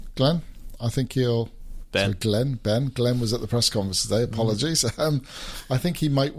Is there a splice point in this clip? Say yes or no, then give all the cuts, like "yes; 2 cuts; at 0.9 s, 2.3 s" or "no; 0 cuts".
no; 0 cuts